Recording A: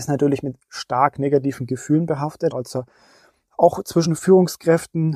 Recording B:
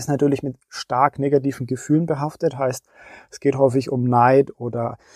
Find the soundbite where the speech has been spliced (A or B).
A